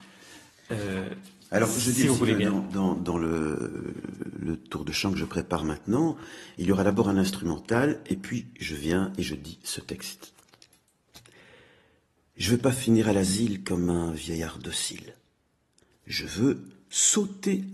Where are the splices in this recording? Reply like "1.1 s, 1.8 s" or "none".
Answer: none